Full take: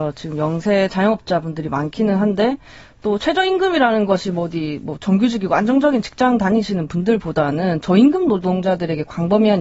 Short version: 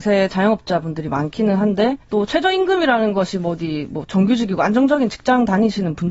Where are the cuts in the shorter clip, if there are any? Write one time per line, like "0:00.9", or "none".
0:02.0